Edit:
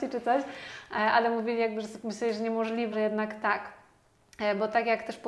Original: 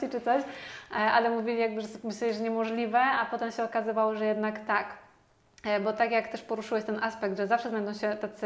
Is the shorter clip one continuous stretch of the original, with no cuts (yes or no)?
no